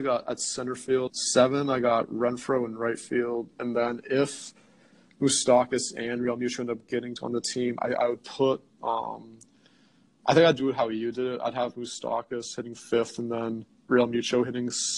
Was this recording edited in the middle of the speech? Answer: yes; 2 cuts; at 1.1 s, 3.5 s

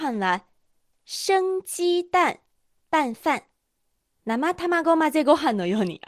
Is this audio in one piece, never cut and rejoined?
no; 1 cut; at 4.1 s

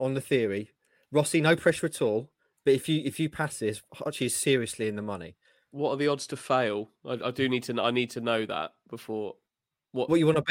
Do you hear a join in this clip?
no; 0 cuts

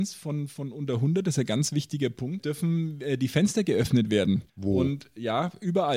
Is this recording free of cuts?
no; 2 cuts; at 2.4 s, 4.5 s

